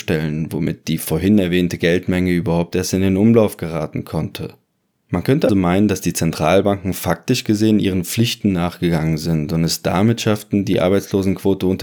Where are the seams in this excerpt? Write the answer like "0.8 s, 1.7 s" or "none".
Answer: 5.5 s